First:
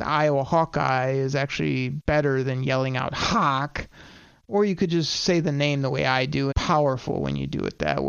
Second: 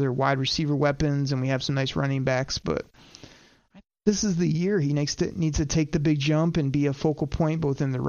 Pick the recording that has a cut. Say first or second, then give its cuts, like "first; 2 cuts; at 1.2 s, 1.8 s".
first; 1 cut; at 6.5 s